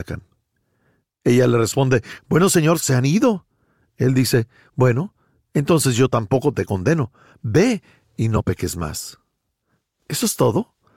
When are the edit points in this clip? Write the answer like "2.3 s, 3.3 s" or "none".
none

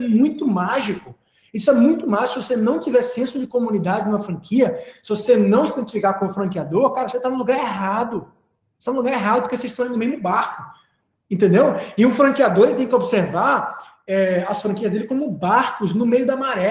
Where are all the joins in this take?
none

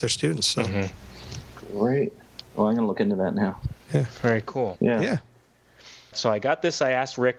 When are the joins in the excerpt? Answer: 2.4 s, 4.8 s, 6.1 s

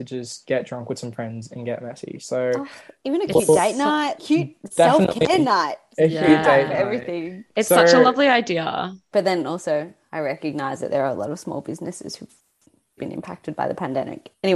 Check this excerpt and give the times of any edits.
4.2 s, 9.1 s, 13.0 s

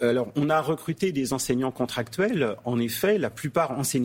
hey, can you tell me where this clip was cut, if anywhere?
none

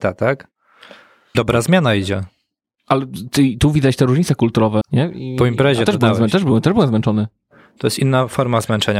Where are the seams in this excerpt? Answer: 1.3 s, 4.8 s

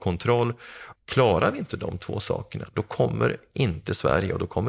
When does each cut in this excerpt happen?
1.0 s

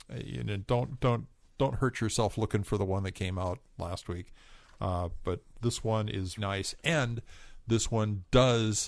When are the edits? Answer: 1.4 s, 6.4 s

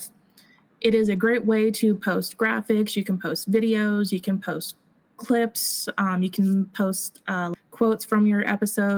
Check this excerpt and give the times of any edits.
7.6 s

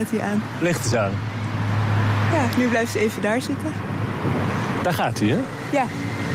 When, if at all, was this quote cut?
4.8 s

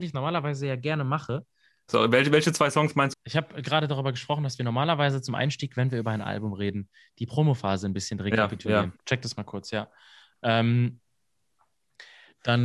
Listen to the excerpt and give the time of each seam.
1.9 s, 3.1 s, 9.0 s

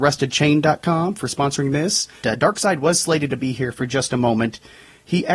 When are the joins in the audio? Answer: 2.2 s

